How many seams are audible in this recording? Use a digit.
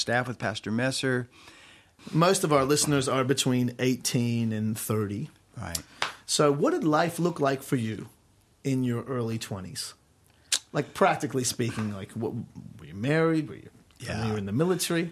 1